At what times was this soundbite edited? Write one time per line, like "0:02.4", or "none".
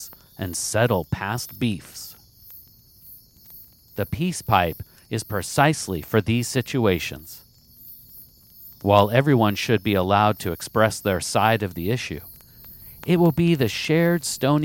none